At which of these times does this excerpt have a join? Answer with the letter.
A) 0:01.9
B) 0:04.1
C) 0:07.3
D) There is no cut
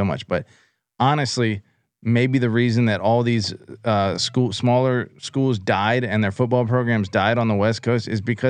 D